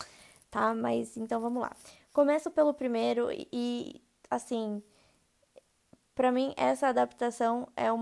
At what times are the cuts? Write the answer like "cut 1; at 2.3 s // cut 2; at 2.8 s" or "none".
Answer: none